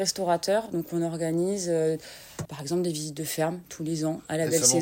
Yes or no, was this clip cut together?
yes